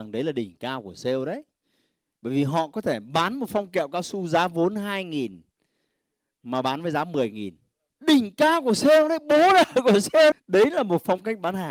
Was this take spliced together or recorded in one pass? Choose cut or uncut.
cut